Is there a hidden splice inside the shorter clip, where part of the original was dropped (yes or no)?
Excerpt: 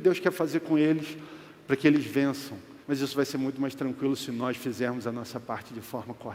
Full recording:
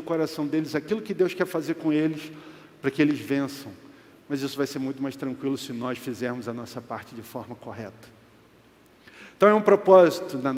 yes